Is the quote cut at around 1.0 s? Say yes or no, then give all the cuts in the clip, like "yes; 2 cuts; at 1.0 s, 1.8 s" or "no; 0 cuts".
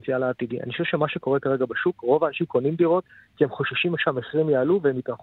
no; 0 cuts